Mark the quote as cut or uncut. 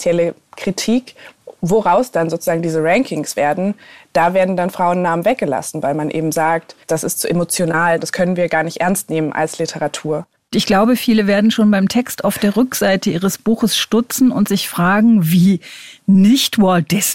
uncut